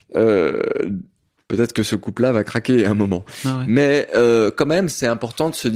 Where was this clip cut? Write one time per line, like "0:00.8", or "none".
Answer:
0:01.4